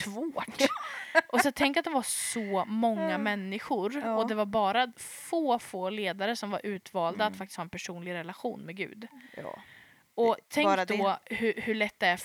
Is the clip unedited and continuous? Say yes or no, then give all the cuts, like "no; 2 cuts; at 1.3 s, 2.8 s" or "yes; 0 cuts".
yes; 0 cuts